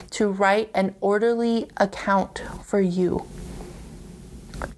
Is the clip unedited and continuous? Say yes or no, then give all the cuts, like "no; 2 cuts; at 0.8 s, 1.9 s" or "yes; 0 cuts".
yes; 0 cuts